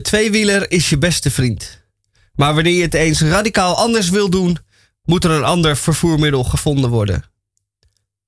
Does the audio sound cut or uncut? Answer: uncut